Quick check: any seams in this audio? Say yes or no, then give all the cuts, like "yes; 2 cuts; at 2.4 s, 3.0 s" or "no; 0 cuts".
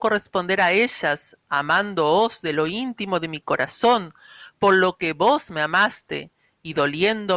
no; 0 cuts